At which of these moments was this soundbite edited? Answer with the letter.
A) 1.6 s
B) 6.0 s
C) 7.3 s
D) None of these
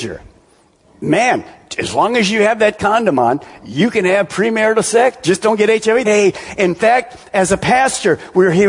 B